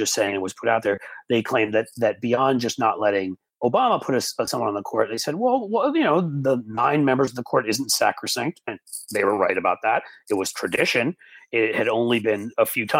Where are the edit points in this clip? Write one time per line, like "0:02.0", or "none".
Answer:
none